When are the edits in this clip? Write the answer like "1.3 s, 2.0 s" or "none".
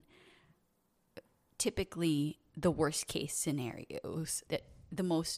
4.5 s